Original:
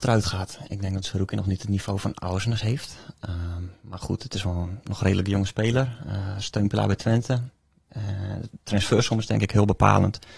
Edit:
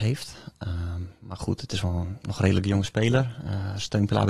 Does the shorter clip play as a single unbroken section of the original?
yes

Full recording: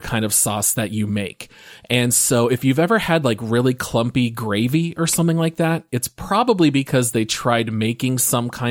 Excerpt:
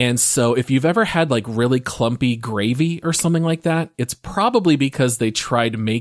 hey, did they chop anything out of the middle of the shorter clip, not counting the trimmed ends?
no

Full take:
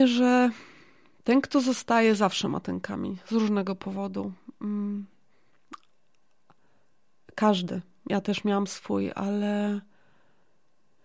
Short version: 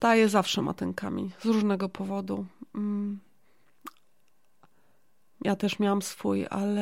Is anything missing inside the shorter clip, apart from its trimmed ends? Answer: yes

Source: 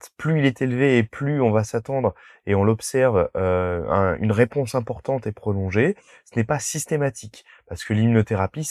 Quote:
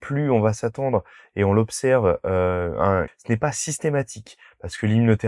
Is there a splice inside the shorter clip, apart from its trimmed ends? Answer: yes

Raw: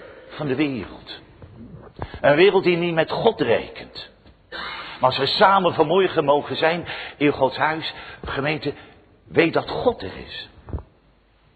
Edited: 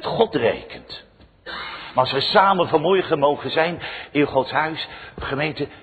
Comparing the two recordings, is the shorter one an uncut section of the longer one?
yes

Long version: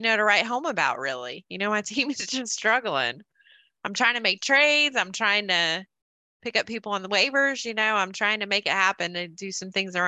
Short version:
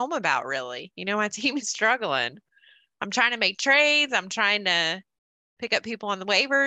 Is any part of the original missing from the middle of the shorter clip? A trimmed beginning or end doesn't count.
yes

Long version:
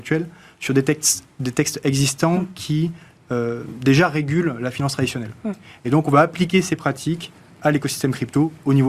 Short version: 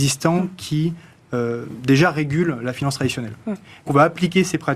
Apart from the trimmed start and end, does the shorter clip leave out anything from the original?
yes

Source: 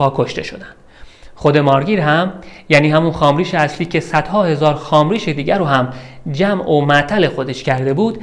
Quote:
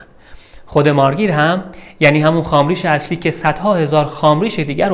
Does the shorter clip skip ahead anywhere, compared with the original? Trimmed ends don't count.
no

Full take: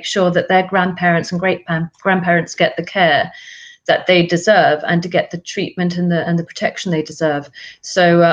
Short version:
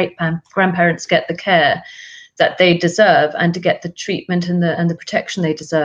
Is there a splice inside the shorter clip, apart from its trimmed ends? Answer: no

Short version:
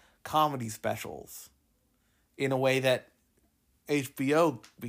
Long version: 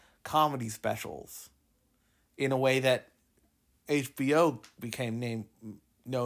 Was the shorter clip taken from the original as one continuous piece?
yes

